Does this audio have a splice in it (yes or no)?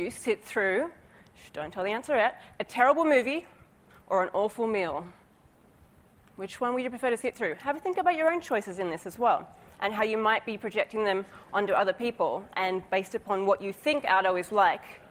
no